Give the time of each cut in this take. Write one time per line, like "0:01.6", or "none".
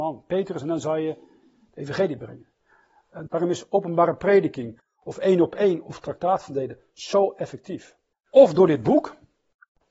0:03.3
0:08.1